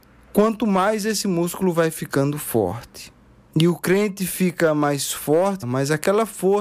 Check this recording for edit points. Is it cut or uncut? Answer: cut